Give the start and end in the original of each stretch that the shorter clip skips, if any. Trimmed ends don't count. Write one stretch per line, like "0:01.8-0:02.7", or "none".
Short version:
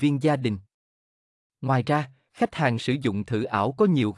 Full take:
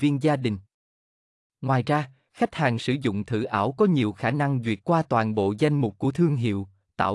none